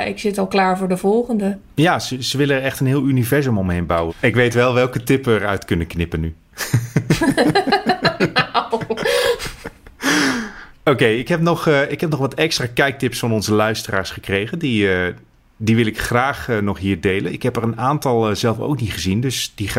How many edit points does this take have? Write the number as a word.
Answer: one